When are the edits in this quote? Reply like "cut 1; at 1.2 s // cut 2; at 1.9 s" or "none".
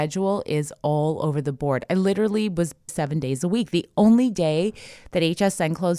cut 1; at 2.9 s